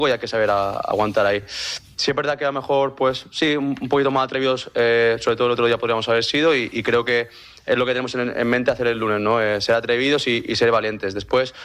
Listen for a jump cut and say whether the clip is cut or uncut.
uncut